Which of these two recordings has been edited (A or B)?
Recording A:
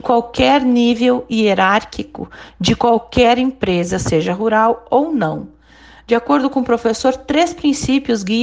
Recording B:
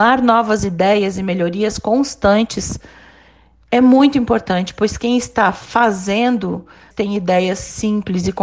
B